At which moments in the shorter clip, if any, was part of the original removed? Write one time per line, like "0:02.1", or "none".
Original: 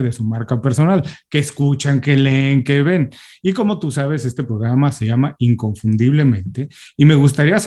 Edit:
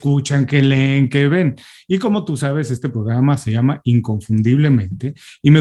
none